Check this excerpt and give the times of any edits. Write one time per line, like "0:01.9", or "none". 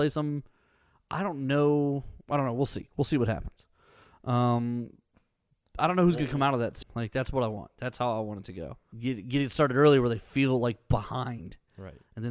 0:06.8
0:08.9